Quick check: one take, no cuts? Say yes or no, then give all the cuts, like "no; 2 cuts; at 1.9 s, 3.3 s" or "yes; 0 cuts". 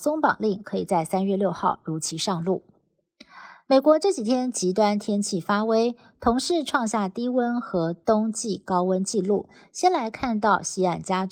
yes; 0 cuts